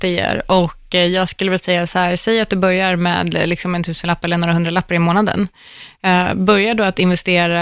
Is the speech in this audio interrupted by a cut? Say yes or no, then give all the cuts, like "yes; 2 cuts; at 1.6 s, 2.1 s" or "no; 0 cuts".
no; 0 cuts